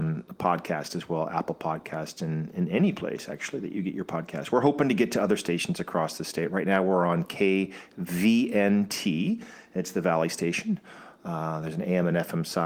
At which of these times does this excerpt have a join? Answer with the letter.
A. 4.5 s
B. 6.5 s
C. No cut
C